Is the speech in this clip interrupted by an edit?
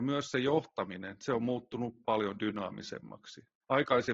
yes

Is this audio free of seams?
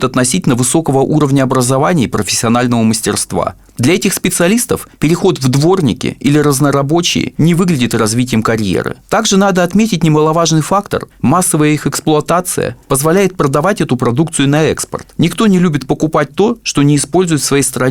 no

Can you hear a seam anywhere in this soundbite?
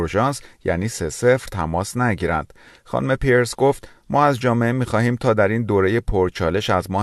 no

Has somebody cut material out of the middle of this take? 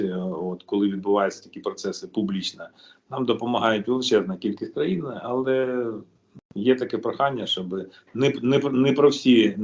no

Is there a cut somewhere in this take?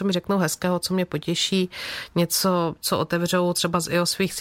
no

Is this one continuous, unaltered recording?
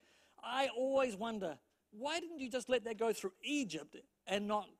no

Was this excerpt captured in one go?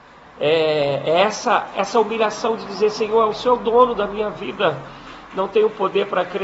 yes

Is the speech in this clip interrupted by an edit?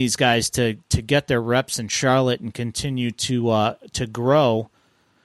no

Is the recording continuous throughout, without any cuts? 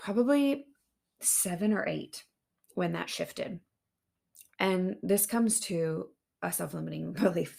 no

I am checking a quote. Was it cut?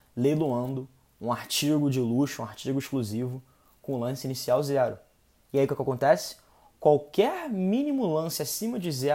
no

